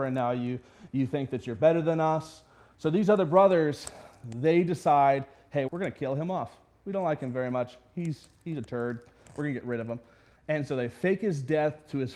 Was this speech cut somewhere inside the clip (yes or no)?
yes